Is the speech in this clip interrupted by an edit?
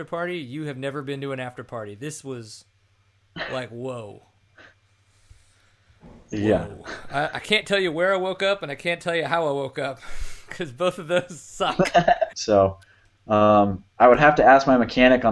yes; 2 cuts; at 12.3 s, 13.9 s

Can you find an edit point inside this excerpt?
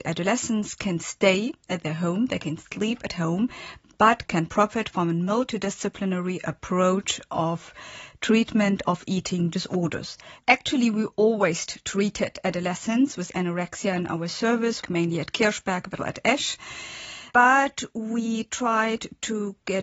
yes; 3 cuts; at 10.4 s, 14.8 s, 16.0 s

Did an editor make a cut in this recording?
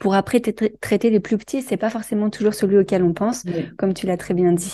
no; 0 cuts

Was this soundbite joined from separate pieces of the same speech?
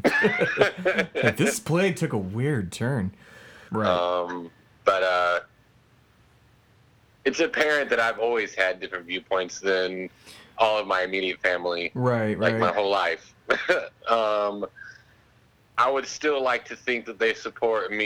yes; 2 cuts; at 3.7 s, 15.7 s

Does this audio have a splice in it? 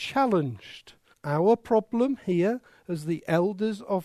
yes; 1 cut; at 1.1 s

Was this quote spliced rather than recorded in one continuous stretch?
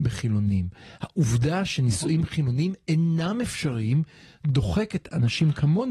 no; 0 cuts

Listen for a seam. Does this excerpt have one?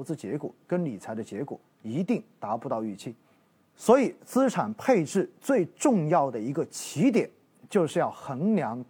no; 0 cuts

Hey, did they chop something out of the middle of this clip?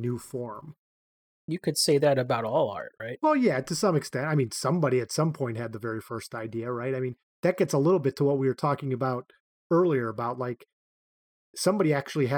no; 0 cuts

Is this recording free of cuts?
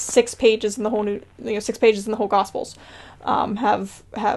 yes; 0 cuts

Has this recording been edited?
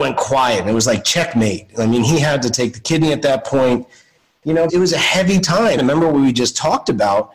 yes; 2 cuts; at 4.7 s, 5.8 s

